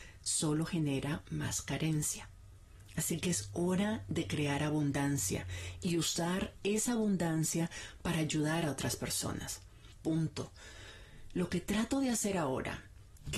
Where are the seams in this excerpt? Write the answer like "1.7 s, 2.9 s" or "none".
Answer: 10.0 s

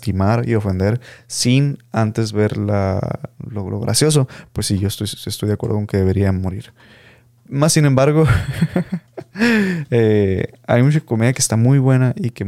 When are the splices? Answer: none

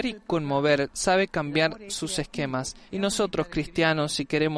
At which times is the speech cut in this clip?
2.9 s

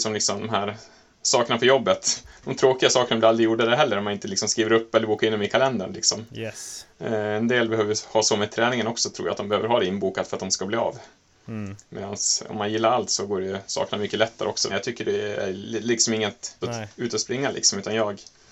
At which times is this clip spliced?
14.7 s, 16.6 s

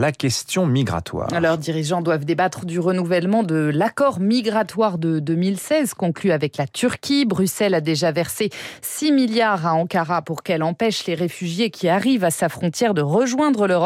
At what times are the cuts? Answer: 2.6 s

